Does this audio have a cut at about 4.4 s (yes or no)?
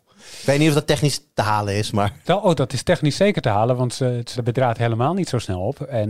yes